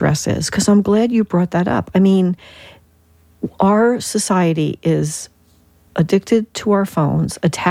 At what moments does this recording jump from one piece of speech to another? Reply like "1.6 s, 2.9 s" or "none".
none